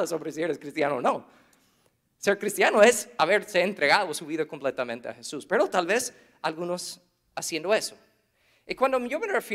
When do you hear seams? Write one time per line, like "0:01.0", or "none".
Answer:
none

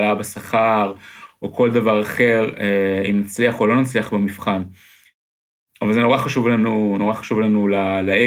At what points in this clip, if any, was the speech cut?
none

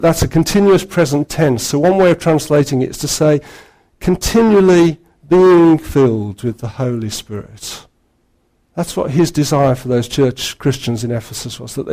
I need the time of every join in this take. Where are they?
none

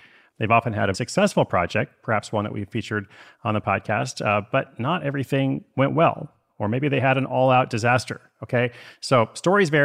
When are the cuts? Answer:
0:00.9

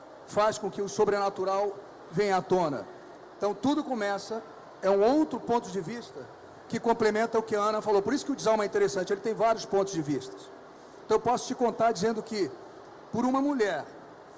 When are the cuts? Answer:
none

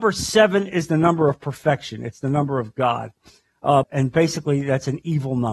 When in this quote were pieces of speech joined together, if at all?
0:03.8

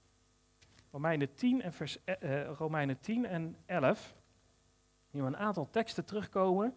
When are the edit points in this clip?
none

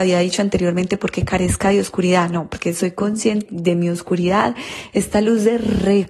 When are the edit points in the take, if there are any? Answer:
0:03.5
0:04.9

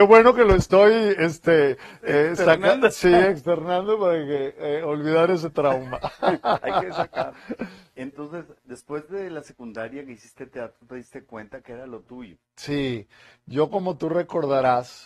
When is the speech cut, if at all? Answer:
0:08.6
0:12.4

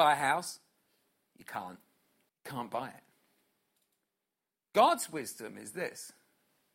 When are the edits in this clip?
0:02.3

